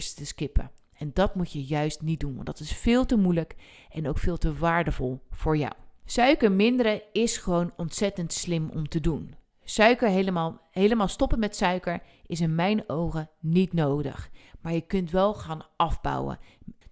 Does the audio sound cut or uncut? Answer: uncut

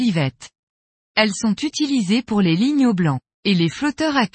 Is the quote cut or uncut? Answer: cut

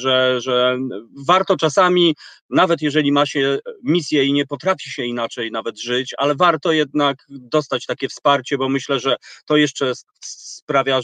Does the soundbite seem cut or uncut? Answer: uncut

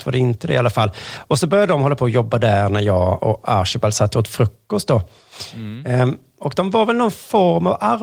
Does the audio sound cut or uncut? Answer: uncut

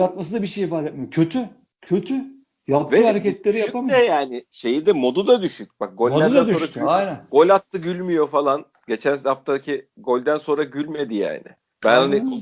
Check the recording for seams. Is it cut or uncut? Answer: uncut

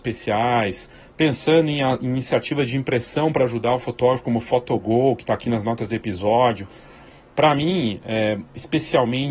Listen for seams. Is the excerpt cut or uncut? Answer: uncut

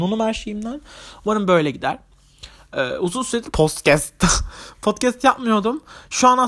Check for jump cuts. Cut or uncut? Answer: cut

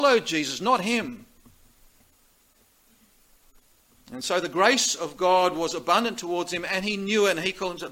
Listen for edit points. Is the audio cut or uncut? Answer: uncut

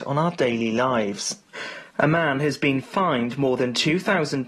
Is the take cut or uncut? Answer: uncut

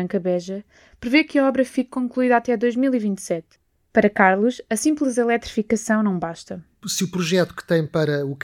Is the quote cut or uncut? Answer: uncut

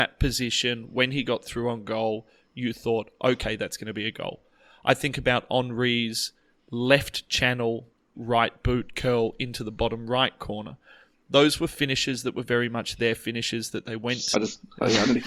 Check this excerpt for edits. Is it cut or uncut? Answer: cut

